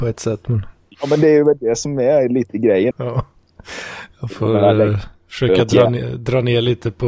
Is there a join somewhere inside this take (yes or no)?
yes